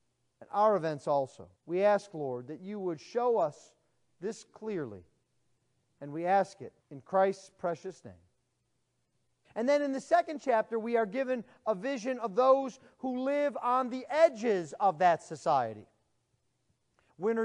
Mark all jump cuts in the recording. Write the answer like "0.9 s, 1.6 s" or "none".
1.6 s, 6.8 s, 9.4 s